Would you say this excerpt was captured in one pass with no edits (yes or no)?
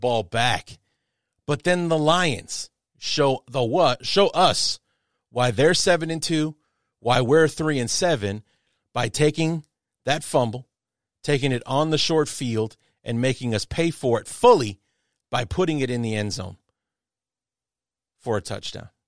yes